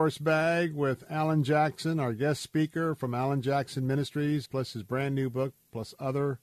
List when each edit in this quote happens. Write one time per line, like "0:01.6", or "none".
0:04.5

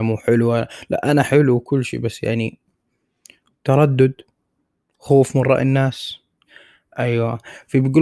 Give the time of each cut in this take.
none

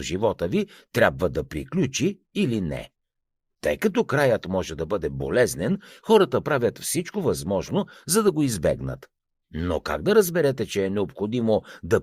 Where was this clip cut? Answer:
none

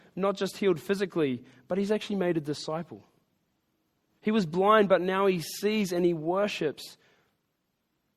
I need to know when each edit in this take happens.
none

